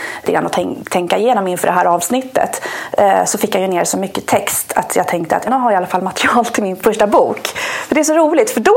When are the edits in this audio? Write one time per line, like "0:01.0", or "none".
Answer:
0:05.5